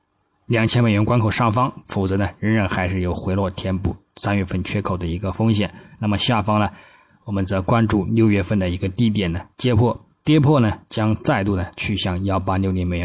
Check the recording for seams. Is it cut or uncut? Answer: cut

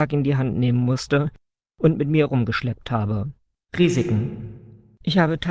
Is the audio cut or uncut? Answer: cut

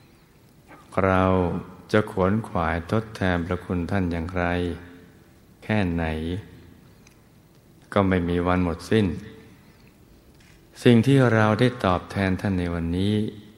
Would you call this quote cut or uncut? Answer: uncut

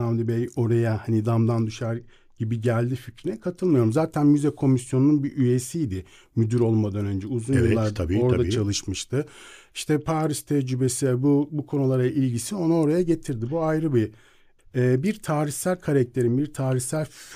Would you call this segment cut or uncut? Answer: cut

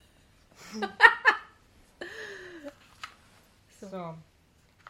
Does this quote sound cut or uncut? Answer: uncut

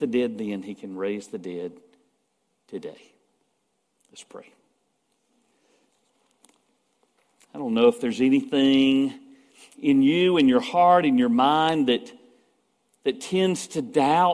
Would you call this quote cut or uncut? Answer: uncut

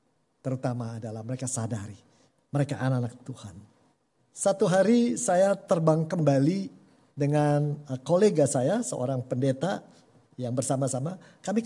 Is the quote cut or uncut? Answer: cut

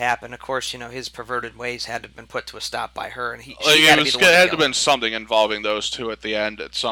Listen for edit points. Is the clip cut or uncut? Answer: uncut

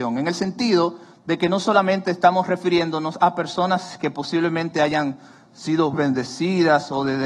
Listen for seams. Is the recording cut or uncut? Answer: cut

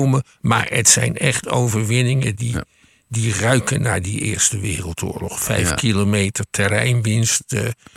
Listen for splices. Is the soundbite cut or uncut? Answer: uncut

